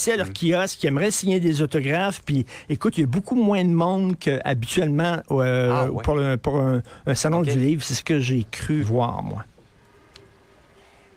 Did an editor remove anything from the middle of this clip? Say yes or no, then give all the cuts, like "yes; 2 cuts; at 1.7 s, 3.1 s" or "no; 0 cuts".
yes; 1 cut; at 8.8 s